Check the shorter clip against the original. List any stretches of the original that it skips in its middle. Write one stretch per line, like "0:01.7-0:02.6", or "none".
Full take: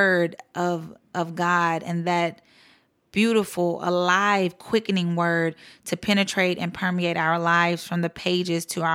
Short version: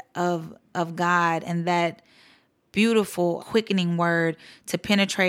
0:03.8-0:04.6